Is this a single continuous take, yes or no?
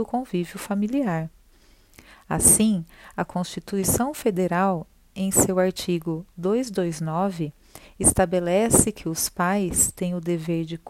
yes